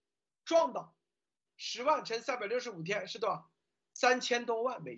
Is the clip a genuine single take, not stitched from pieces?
no; 1 cut; at 1.5 s

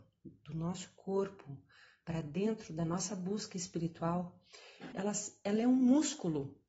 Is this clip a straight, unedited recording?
no; 1 cut; at 4.9 s

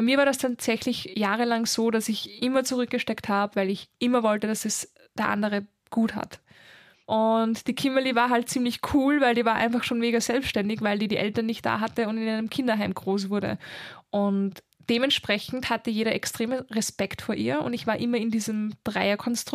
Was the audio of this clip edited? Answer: yes; 1 cut; at 7.1 s

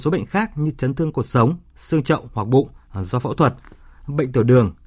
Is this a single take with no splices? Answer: yes; 0 cuts

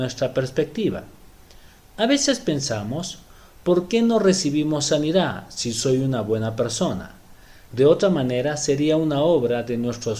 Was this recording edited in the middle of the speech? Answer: yes; 1 cut; at 7.7 s

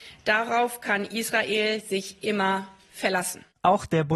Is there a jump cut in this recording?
no; 0 cuts

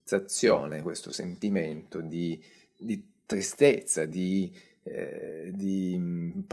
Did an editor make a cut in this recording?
no; 0 cuts

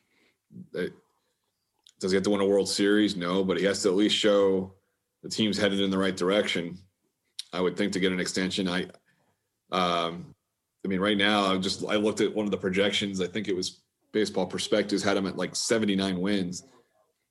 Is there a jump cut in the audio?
no; 0 cuts

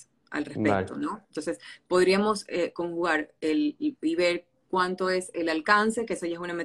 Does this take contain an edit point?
no; 0 cuts

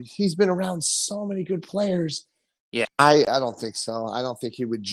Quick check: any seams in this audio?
yes; 1 cut; at 2.9 s

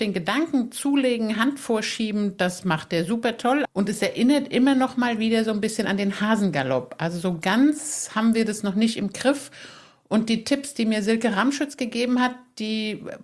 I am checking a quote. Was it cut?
yes; 1 cut; at 3.7 s

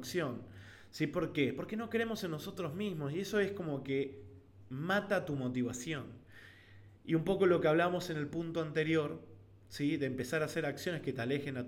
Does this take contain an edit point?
no; 0 cuts

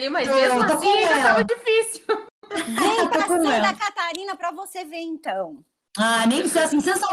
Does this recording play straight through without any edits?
yes; 0 cuts

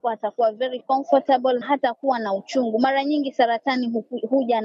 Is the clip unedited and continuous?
no; 1 cut; at 1.6 s

